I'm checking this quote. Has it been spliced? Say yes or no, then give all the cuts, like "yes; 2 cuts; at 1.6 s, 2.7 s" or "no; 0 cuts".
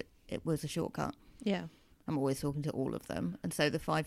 yes; 1 cut; at 1.9 s